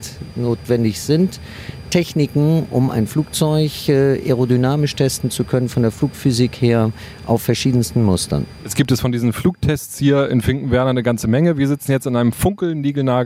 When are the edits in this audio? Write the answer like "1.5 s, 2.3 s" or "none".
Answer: none